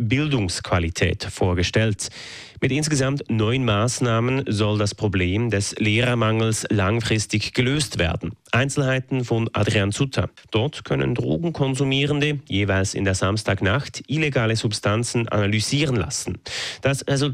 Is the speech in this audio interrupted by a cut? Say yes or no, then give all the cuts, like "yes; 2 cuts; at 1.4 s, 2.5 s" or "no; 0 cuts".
yes; 1 cut; at 10.4 s